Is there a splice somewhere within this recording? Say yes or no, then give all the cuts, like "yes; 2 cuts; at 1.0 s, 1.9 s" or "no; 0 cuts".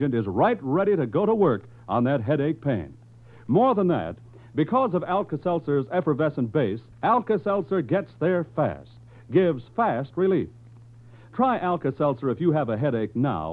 yes; 1 cut; at 6.9 s